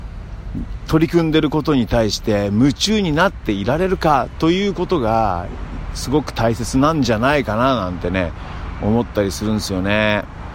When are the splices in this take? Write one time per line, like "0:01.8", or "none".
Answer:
none